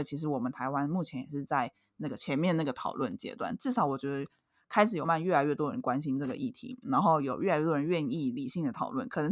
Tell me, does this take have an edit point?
yes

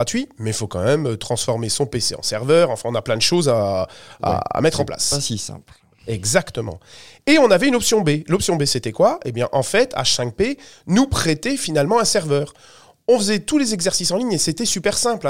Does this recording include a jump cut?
no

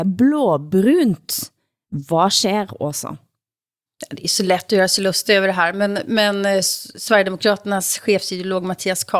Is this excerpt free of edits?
yes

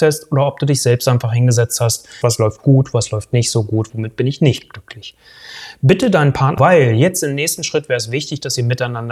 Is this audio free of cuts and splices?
no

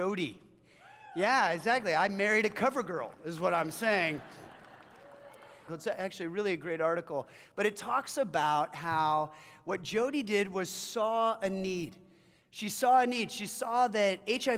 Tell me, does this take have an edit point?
yes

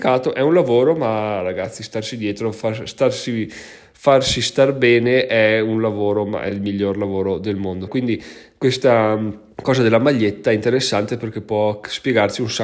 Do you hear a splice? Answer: yes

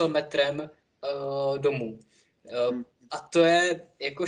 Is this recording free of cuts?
yes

